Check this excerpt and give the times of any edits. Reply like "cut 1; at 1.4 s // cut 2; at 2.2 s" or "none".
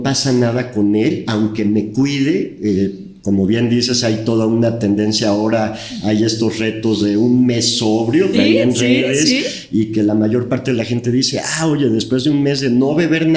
cut 1; at 1.2 s // cut 2; at 8.3 s

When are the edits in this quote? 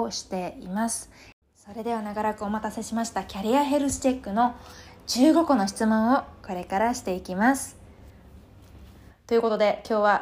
cut 1; at 9.1 s

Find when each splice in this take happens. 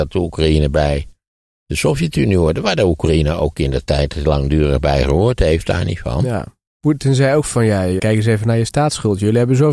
cut 1; at 6.7 s // cut 2; at 8.0 s

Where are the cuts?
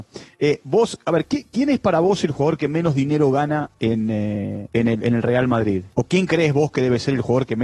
none

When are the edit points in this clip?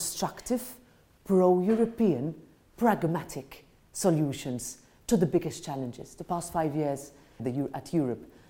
cut 1; at 7.4 s

